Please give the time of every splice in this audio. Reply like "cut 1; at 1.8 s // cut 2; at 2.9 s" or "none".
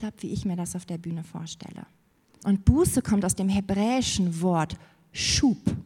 cut 1; at 2.4 s